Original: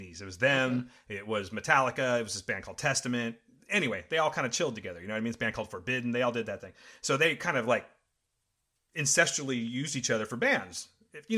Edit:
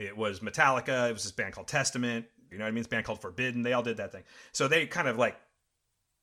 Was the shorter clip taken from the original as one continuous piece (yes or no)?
no